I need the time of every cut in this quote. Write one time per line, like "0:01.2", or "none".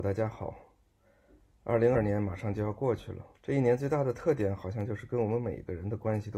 0:01.9
0:03.3